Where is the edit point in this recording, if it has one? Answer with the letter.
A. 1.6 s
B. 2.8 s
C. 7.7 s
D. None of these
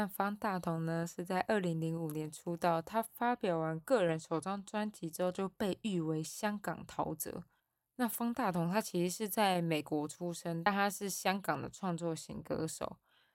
D